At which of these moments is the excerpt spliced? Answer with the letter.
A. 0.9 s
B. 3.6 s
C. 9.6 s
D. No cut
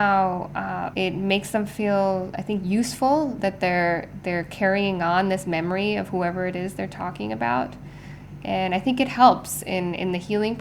A